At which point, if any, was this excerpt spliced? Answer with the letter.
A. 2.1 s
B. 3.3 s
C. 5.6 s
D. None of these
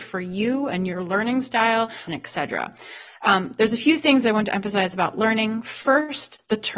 A